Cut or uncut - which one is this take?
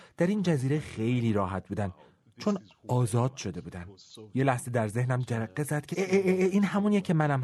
cut